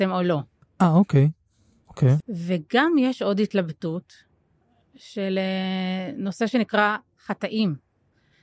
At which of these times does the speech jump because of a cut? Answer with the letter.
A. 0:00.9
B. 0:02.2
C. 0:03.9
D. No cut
B